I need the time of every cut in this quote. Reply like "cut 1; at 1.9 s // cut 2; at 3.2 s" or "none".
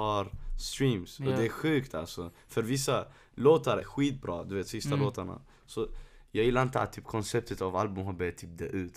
cut 1; at 3.8 s